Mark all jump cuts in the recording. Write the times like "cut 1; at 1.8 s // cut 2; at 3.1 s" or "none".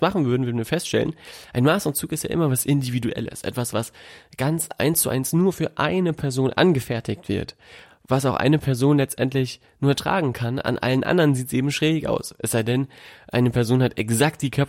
none